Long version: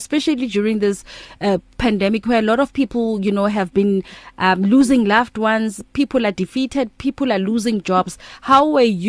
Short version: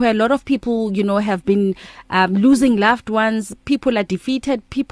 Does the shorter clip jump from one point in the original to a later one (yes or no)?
no